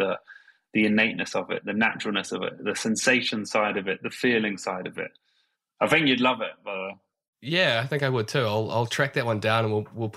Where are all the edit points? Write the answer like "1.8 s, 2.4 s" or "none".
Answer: 2.6 s